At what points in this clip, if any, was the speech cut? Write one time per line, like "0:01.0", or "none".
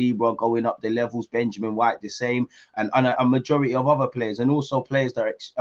0:03.2